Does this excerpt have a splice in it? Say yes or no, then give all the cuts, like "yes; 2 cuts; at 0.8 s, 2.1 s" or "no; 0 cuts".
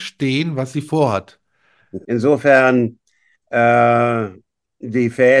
yes; 1 cut; at 2.0 s